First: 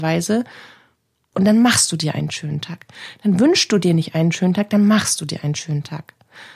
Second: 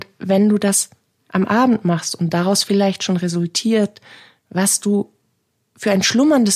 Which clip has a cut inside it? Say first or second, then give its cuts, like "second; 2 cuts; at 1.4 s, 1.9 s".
first; 1 cut; at 1.3 s